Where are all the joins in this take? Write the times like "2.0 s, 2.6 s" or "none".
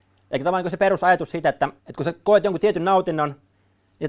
1.8 s

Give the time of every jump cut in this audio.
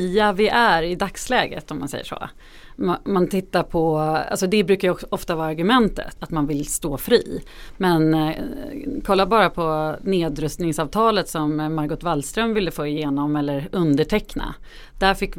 6.2 s

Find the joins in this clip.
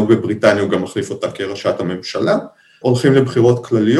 2.8 s

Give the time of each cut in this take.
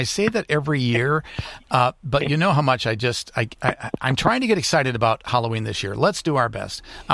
none

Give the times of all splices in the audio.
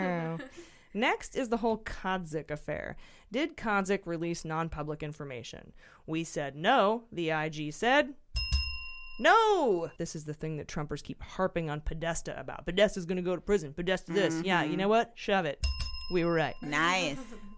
10.0 s

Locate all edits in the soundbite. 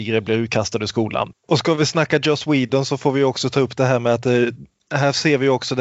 1.3 s

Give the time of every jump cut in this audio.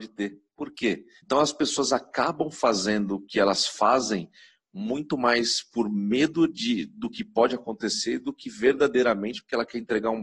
1.2 s

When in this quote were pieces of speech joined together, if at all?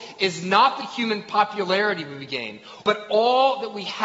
2.8 s

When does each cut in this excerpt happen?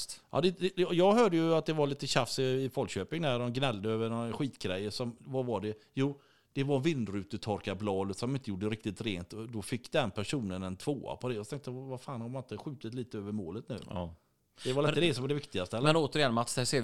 none

